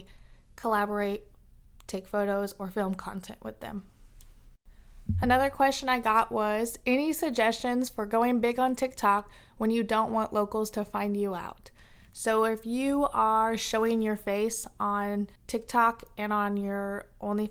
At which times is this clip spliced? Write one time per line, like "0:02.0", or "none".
0:15.4